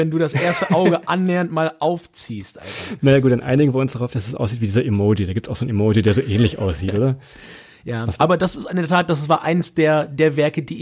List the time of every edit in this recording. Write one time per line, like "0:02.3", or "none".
none